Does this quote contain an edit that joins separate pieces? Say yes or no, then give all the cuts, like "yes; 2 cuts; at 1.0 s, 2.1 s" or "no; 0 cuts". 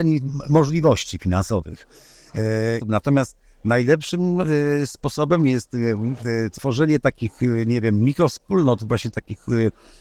yes; 1 cut; at 2.8 s